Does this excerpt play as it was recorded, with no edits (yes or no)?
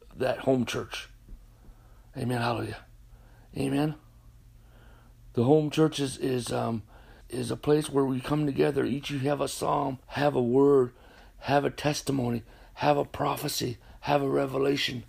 no